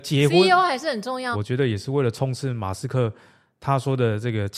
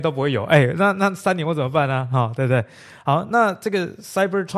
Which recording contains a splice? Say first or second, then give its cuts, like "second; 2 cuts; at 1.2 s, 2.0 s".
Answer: first; 1 cut; at 1.3 s